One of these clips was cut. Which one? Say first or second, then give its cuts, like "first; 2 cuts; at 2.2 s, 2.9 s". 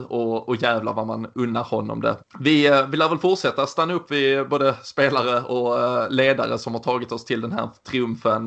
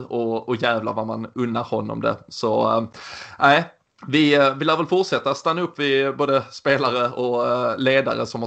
first; 1 cut; at 2.2 s